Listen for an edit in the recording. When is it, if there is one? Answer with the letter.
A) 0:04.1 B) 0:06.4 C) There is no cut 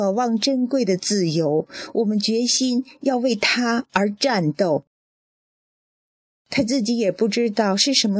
B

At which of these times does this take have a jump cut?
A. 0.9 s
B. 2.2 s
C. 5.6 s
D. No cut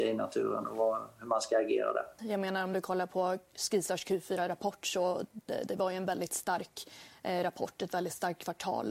B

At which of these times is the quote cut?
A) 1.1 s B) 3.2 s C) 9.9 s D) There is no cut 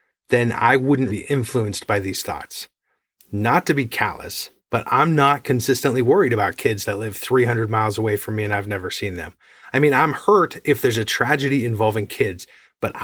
A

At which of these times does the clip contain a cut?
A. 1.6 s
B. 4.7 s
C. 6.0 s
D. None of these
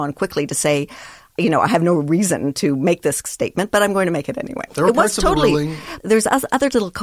B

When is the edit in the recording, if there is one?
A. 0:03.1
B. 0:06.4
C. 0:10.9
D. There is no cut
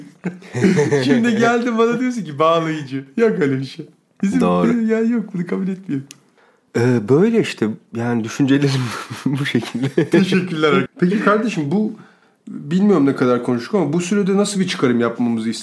C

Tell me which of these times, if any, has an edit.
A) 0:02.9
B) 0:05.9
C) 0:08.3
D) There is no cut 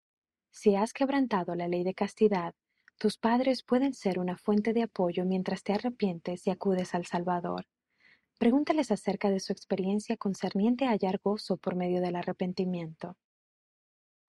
D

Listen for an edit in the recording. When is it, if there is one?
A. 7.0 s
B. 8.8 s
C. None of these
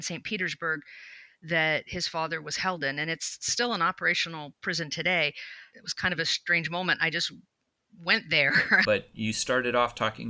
B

